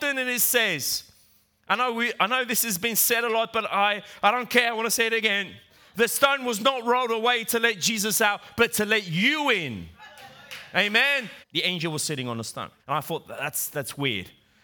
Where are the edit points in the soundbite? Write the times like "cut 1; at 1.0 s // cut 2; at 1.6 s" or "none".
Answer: cut 1; at 11.4 s // cut 2; at 12.8 s